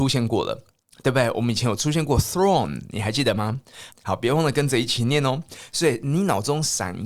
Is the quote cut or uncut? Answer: cut